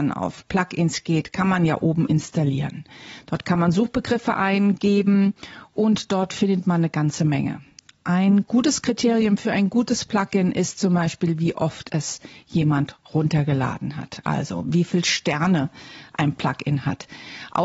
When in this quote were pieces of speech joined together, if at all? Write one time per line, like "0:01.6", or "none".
none